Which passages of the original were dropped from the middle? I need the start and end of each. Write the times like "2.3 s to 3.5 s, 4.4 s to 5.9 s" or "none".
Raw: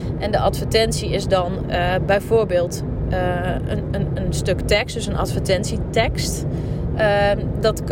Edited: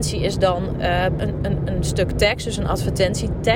2.1 s to 3.7 s